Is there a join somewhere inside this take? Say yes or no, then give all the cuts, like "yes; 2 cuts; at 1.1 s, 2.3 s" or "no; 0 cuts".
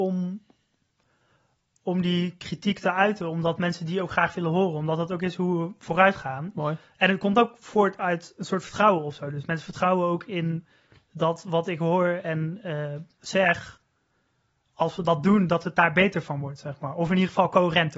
no; 0 cuts